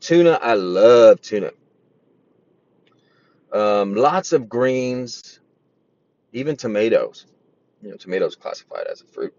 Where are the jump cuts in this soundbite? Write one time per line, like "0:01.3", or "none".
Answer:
none